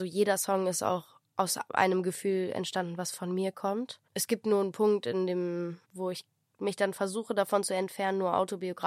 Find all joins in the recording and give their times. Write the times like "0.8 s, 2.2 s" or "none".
4.1 s, 5.8 s